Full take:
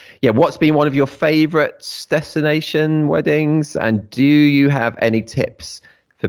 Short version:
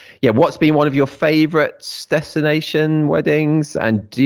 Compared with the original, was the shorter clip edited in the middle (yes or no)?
no